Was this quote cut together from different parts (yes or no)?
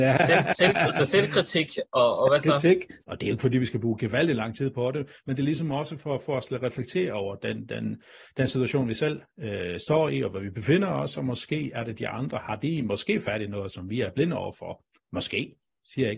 yes